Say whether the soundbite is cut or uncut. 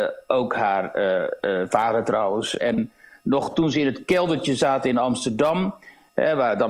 cut